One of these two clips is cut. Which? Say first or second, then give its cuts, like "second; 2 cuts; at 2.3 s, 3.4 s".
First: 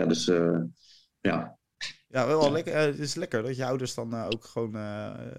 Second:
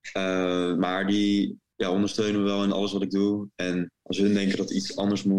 second; 1 cut; at 4.0 s